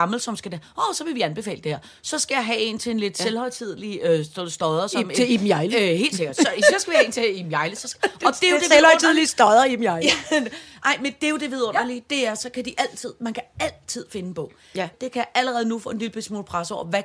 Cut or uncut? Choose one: cut